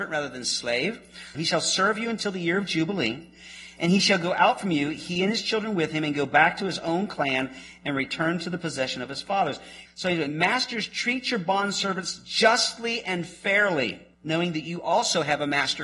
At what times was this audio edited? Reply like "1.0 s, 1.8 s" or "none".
1.3 s, 9.9 s, 14.1 s